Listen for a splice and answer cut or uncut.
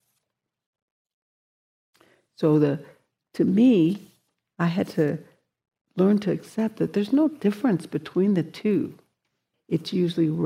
cut